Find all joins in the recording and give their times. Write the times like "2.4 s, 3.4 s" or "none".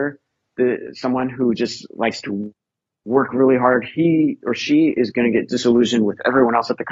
none